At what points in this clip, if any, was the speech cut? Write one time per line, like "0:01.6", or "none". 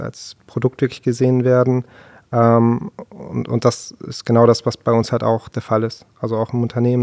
none